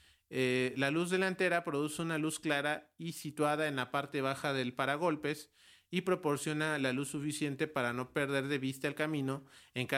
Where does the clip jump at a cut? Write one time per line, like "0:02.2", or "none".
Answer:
none